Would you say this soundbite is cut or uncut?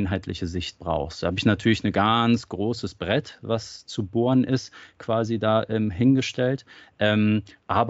uncut